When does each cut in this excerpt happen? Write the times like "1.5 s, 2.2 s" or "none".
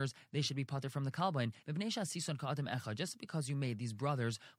1.6 s